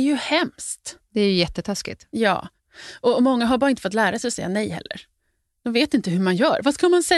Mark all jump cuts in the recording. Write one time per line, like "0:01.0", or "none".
none